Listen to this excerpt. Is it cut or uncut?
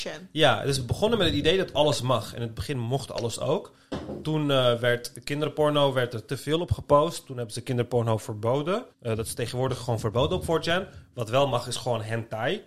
cut